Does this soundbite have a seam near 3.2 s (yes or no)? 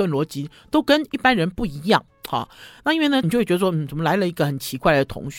yes